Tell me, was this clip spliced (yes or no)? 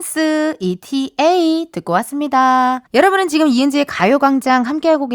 yes